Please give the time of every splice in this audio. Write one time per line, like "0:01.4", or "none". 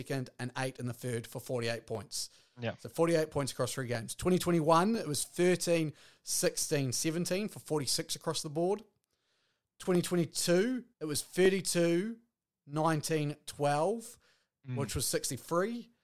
0:10.9